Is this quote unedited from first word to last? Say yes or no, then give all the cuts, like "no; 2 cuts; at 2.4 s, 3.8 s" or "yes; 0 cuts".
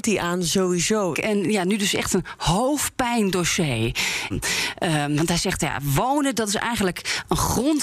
no; 2 cuts; at 1.1 s, 4.3 s